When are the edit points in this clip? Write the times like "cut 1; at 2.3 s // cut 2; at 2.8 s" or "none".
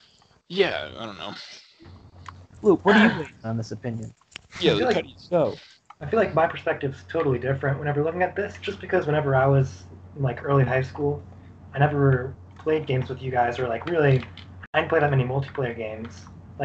none